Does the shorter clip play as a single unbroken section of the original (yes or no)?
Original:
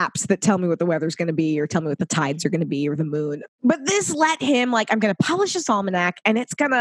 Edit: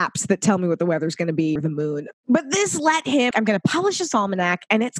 no